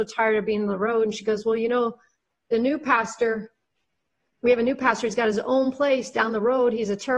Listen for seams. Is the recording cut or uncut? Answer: uncut